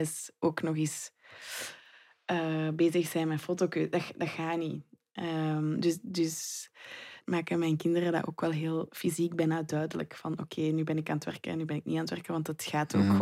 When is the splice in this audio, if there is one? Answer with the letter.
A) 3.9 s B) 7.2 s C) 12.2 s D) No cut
B